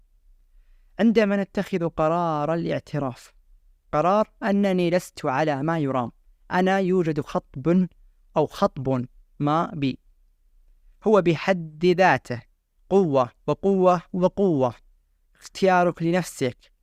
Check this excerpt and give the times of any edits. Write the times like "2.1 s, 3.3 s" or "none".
13.4 s